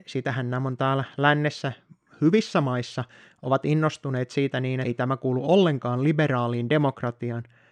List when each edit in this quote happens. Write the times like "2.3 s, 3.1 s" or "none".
4.8 s